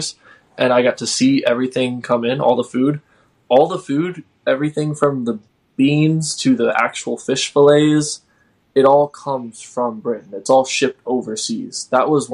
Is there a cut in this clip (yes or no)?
no